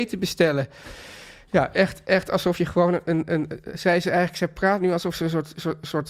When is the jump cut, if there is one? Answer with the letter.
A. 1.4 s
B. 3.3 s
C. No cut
C